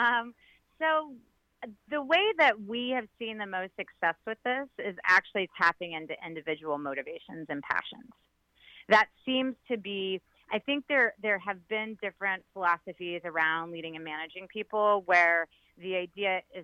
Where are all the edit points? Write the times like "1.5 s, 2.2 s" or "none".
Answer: none